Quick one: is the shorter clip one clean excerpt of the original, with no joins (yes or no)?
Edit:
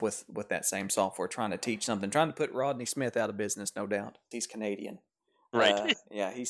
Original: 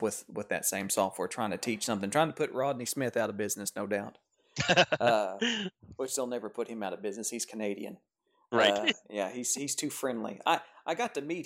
no